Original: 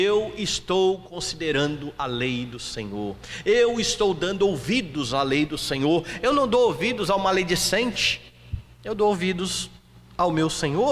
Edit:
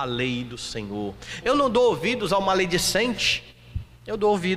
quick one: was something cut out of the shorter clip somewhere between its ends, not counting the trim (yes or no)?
yes